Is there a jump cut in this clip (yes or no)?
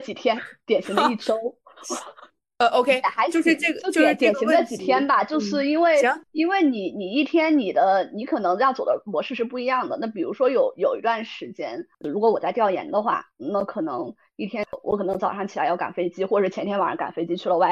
no